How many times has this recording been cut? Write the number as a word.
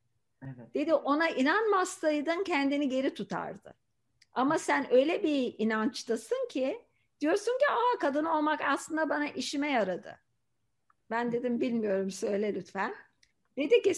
one